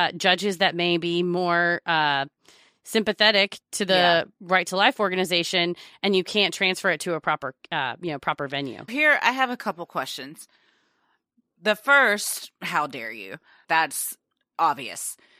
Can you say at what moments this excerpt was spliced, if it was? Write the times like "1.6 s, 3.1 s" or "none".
8.9 s, 13.6 s